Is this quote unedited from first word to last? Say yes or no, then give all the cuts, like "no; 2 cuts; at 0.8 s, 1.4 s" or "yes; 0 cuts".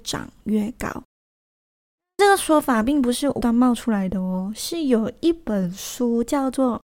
no; 1 cut; at 3.4 s